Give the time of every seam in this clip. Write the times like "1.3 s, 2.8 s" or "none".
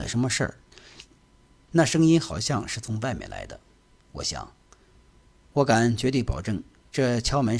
1.7 s